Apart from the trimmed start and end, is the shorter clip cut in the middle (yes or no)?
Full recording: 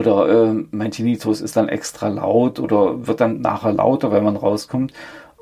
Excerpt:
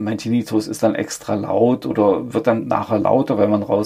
no